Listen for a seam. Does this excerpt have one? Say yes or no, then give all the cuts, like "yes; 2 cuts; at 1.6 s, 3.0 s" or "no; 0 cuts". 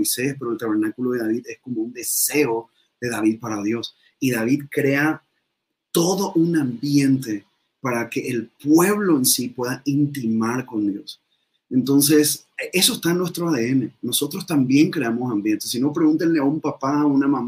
no; 0 cuts